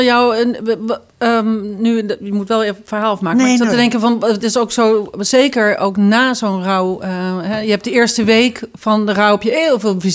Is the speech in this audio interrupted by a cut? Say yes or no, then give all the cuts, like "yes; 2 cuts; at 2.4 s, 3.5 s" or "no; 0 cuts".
no; 0 cuts